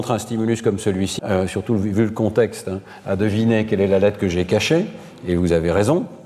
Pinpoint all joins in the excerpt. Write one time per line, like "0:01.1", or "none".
0:01.2